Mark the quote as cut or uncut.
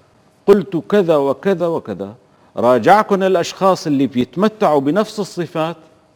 cut